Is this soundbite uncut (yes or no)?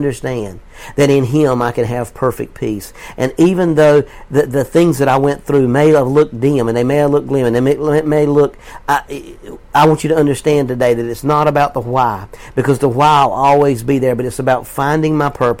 yes